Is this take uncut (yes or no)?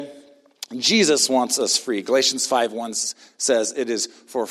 yes